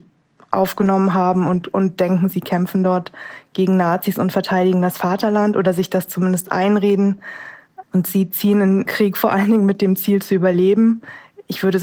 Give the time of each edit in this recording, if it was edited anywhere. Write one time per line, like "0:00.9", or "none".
0:07.8
0:08.8